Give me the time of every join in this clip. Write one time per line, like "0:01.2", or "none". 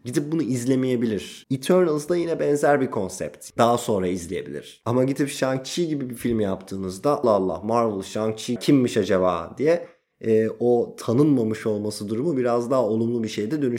0:01.4
0:03.6
0:07.2